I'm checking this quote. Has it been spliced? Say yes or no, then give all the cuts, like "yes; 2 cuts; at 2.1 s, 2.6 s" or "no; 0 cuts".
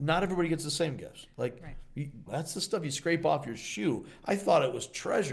yes; 1 cut; at 2.3 s